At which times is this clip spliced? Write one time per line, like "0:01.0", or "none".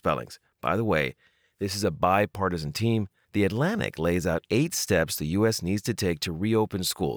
0:03.3

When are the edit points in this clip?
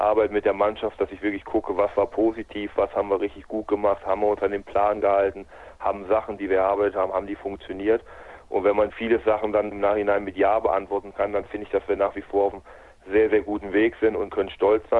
0:06.4

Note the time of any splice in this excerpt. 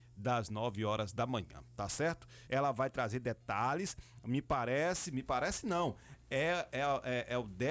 0:02.5

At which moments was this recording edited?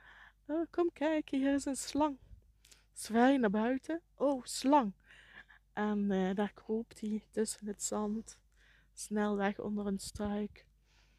none

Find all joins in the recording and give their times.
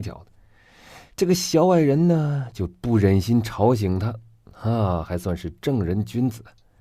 none

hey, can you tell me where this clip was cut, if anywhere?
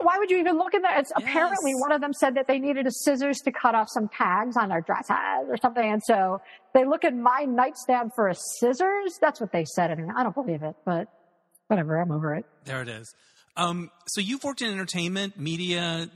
none

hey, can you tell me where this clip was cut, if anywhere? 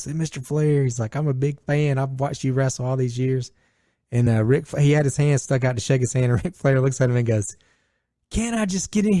none

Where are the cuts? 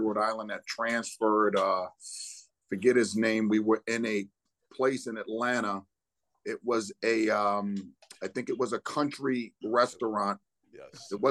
none

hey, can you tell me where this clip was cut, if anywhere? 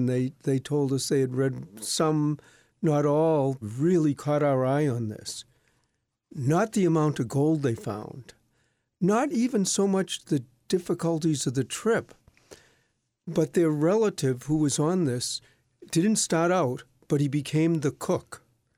0:03.6

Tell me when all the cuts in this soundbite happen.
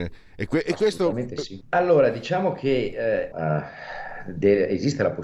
0:01.6
0:03.3

